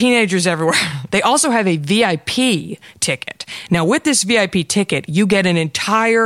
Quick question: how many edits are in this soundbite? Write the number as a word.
one